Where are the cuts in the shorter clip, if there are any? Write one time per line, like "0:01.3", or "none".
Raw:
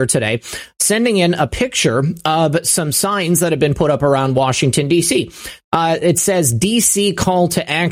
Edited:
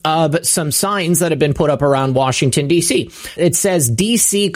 0:03.4